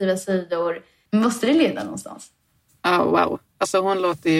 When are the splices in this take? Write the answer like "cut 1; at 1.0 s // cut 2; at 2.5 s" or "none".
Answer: cut 1; at 1.1 s